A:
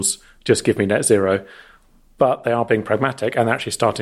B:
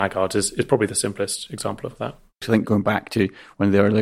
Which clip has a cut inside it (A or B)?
B